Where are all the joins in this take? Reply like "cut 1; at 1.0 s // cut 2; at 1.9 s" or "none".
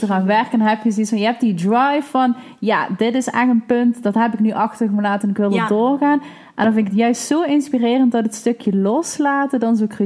none